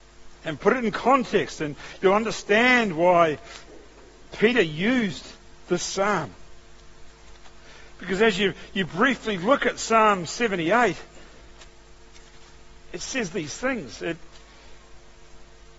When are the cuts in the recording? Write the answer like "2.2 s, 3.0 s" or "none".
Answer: none